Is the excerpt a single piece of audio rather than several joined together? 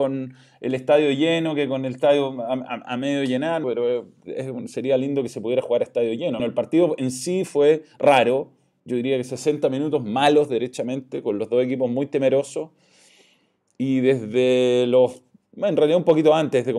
no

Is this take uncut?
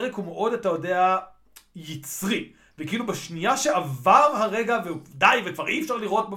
yes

